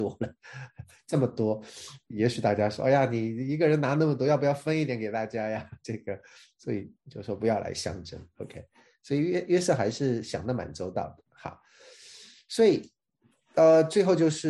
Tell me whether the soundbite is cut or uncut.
uncut